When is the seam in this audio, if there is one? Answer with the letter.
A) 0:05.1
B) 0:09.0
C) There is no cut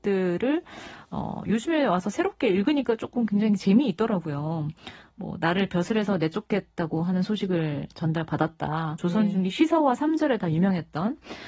B